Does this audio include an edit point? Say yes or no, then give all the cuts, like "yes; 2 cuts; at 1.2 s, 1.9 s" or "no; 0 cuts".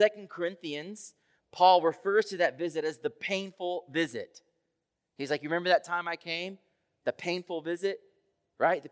no; 0 cuts